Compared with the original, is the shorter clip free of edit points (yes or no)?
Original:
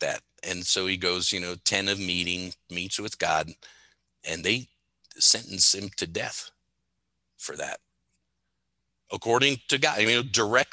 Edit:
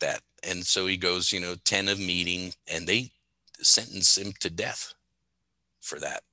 no